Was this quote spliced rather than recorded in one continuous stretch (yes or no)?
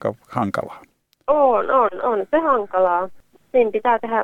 no